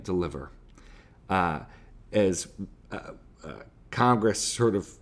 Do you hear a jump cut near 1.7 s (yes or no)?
no